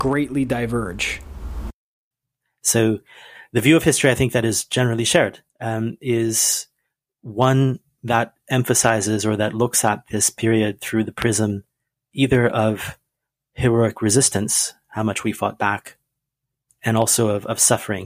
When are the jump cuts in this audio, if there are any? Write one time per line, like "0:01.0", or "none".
0:05.5